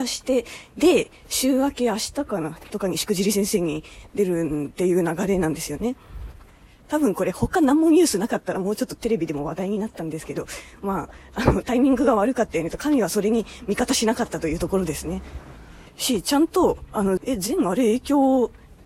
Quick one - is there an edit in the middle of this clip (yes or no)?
yes